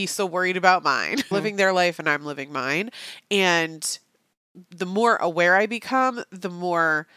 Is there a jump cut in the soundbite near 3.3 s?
no; 2 cuts; at 1.3 s, 4.6 s

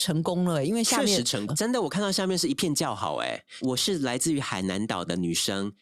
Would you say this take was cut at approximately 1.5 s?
yes; 2 cuts; at 1.5 s, 3.6 s

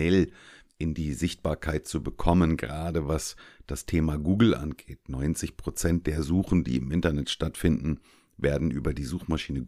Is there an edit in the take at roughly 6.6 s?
no; 0 cuts

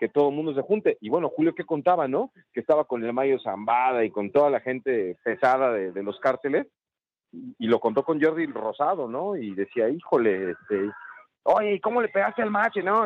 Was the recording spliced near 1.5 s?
no; 0 cuts

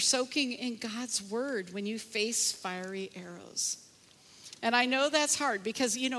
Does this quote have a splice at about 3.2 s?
no; 1 cut; at 4.6 s

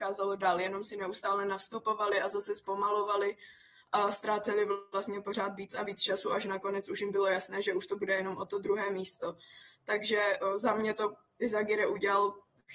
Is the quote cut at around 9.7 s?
no; 0 cuts

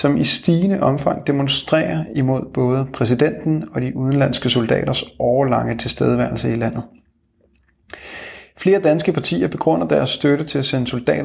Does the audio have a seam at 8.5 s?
no; 0 cuts

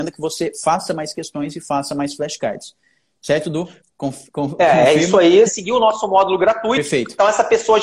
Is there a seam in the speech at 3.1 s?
no; 1 cut; at 5.5 s

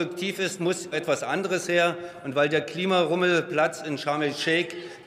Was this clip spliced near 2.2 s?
no; 1 cut; at 0.9 s

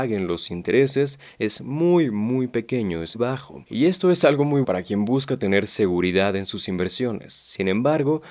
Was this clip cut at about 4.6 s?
yes; 2 cuts; at 3.1 s, 4.6 s

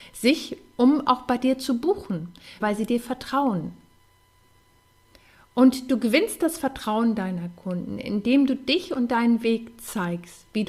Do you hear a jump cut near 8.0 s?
no; 1 cut; at 2.6 s

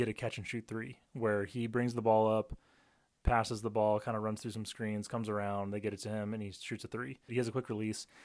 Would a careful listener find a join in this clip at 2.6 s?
no; 1 cut; at 7.3 s

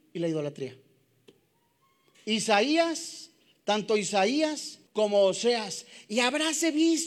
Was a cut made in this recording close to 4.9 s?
yes; 1 cut; at 4.9 s

